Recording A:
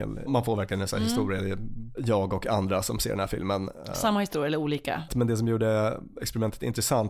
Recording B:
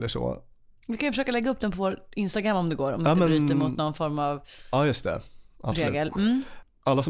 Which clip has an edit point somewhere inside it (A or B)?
A